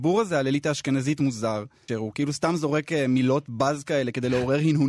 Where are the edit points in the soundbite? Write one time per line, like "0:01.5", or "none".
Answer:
0:01.9